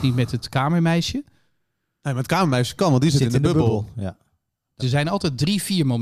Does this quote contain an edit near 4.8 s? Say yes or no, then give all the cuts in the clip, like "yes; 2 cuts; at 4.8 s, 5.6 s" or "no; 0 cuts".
yes; 1 cut; at 4.8 s